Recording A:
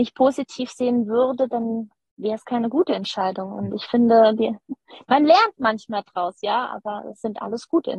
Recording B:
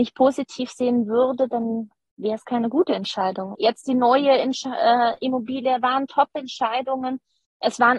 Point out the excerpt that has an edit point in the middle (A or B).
B